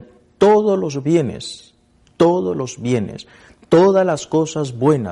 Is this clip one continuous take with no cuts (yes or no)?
yes